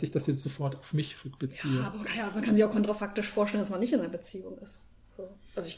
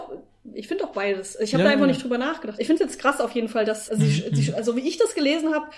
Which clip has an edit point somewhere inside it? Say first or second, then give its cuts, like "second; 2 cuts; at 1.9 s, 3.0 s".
second; 2 cuts; at 2.6 s, 3.9 s